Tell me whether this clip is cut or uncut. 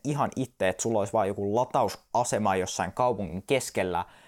uncut